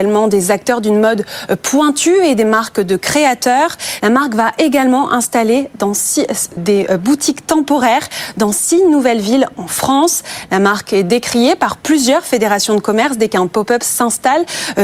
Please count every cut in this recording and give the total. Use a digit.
2